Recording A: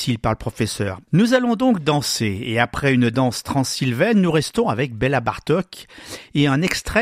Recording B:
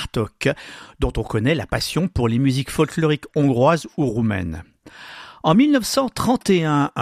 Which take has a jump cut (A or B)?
A